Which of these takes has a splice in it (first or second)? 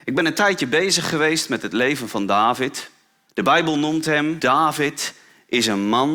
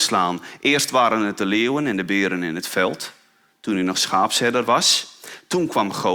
first